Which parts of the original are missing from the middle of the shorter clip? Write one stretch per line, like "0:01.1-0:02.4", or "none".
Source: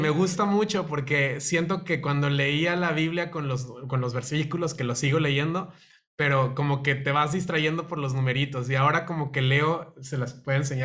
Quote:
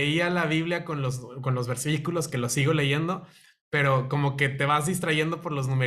none